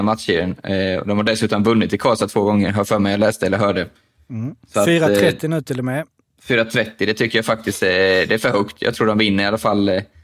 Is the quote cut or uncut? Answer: uncut